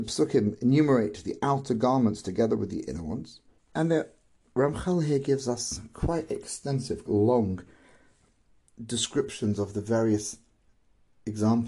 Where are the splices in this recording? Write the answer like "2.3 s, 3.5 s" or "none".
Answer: 3.6 s, 7.1 s